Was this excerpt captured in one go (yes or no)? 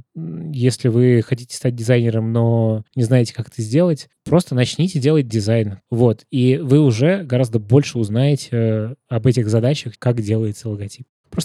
no